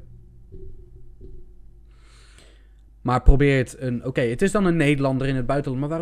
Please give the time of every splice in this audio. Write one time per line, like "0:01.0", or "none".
none